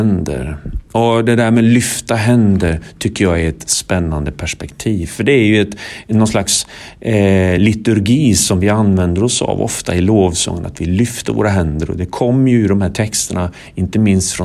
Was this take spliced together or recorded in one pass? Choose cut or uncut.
uncut